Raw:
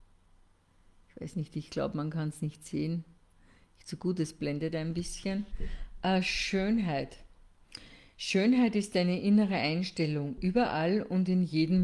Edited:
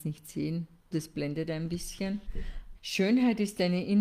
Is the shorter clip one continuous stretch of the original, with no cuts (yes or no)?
no